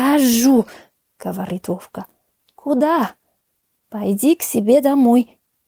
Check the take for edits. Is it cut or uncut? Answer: uncut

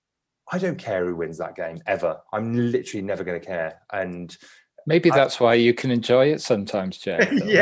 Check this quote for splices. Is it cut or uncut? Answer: uncut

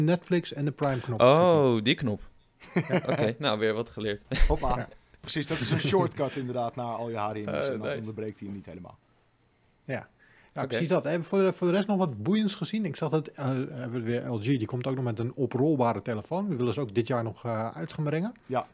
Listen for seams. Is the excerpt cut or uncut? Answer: uncut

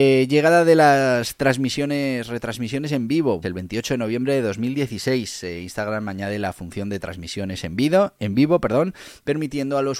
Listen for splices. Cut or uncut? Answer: cut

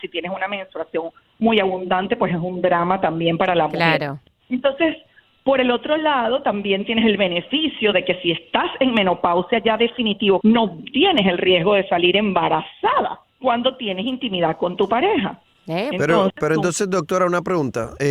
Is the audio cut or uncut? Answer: cut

